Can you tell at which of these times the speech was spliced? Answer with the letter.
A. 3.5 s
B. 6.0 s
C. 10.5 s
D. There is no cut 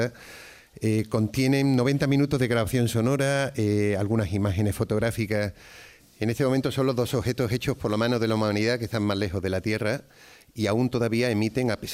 B